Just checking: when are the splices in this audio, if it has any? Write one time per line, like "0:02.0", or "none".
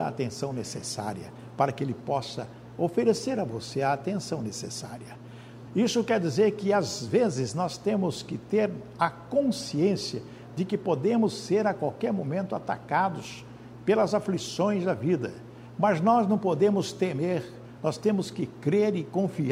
0:05.7
0:17.8